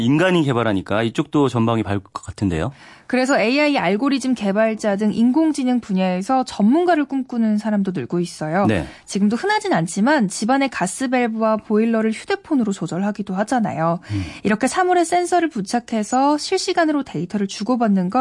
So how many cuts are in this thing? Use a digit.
0